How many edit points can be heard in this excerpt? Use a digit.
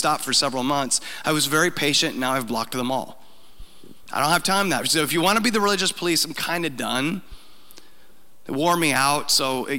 0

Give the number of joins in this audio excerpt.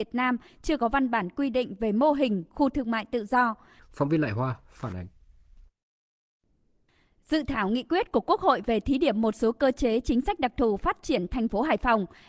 1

